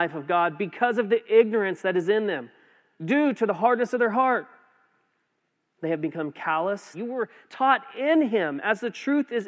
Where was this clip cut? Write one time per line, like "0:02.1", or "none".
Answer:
0:06.9